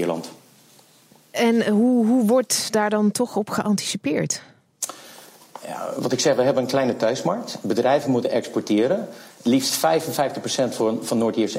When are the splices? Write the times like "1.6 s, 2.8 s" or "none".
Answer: none